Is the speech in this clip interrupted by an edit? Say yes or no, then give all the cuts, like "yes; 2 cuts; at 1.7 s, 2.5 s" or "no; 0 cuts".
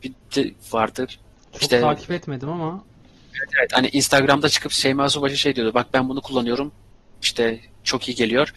yes; 1 cut; at 1.1 s